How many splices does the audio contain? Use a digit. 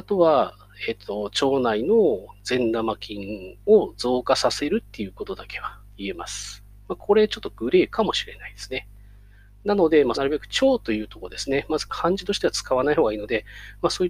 1